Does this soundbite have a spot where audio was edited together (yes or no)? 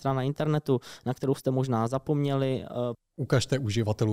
yes